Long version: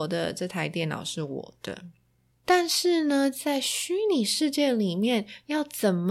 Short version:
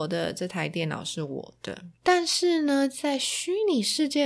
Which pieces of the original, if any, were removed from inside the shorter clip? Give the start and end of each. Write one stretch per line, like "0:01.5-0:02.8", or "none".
0:01.9-0:02.4